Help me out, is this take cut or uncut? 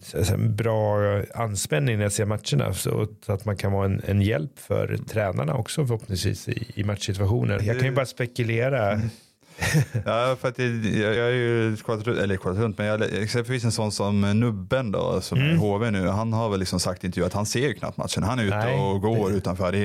cut